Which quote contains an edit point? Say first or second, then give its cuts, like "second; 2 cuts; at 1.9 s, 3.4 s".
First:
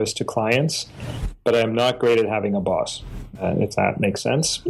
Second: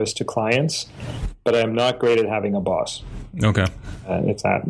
first; 1 cut; at 3.4 s